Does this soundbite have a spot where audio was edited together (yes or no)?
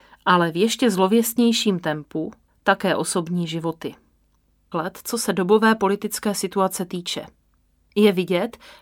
yes